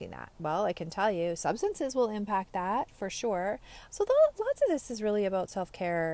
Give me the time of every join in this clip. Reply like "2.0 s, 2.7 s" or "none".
3.9 s